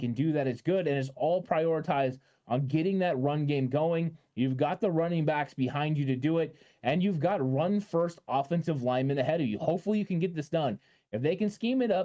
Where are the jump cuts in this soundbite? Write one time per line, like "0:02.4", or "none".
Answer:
none